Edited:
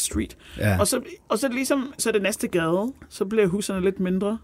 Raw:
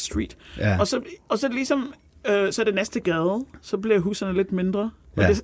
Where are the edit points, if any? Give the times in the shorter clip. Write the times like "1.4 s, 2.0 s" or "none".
2.0 s

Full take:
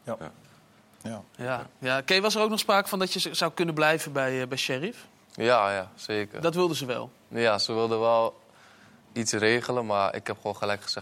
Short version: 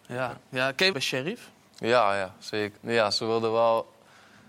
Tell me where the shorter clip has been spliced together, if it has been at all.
0.9 s, 2.8 s

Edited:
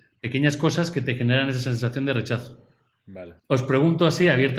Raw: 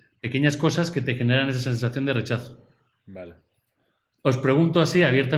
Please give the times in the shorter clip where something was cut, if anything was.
3.4 s

